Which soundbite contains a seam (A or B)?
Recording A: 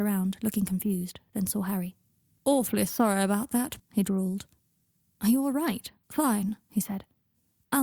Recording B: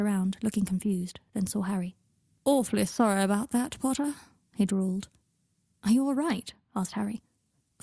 A